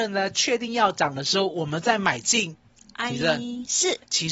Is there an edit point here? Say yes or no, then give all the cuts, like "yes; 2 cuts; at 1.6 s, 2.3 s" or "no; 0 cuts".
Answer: no; 0 cuts